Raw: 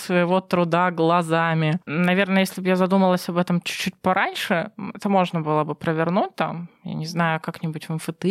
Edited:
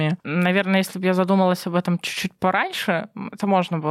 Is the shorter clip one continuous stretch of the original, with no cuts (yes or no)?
yes